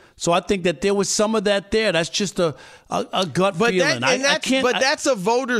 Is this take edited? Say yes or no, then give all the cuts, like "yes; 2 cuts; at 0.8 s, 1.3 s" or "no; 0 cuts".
no; 0 cuts